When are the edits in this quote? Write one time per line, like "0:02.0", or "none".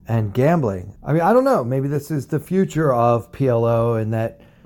0:01.0